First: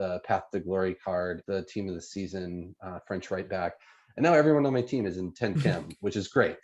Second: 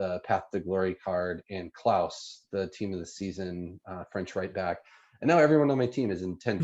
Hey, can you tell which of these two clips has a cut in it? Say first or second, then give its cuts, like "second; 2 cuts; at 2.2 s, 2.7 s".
first; 1 cut; at 1.4 s